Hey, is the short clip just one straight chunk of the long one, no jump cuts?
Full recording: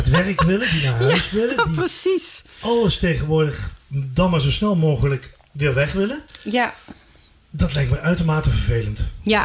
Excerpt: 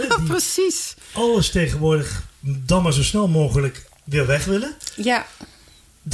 yes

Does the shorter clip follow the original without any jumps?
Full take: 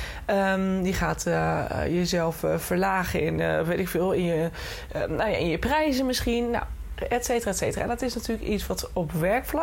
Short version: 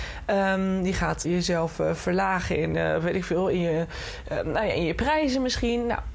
no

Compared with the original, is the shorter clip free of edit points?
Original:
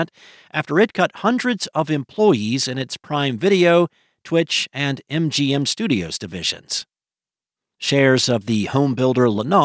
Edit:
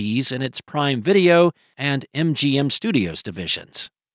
no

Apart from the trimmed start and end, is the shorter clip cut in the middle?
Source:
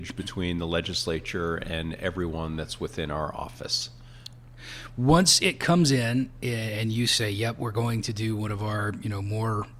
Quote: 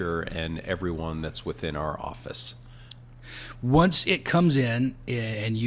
no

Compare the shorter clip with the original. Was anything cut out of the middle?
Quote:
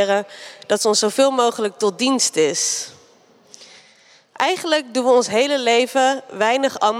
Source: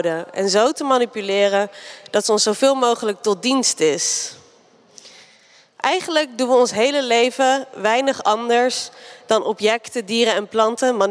no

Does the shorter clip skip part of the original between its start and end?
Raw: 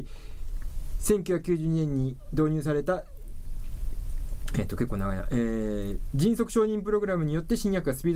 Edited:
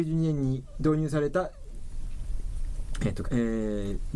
yes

